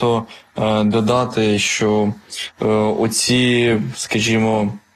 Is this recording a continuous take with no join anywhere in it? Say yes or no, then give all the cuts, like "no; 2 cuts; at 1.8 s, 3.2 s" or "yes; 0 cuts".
yes; 0 cuts